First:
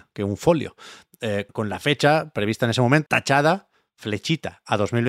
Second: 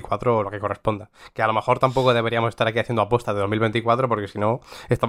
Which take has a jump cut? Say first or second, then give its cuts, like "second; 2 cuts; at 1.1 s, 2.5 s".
first; 2 cuts; at 1.5 s, 3.1 s